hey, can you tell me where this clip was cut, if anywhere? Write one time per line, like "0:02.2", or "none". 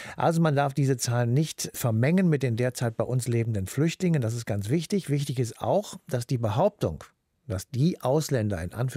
none